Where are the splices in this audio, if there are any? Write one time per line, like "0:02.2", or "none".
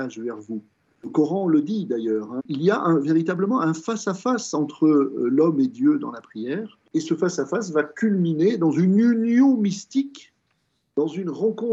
0:02.4
0:06.9

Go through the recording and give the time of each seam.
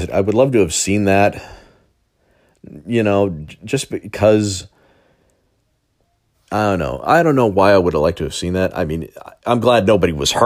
none

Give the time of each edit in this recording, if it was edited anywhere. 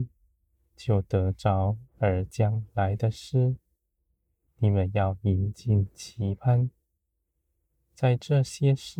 0:01.9
0:04.5

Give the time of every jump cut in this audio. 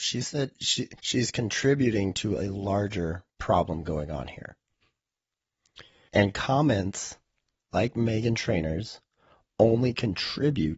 0:01.0
0:06.1

